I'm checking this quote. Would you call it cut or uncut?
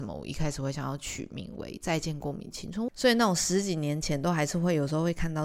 cut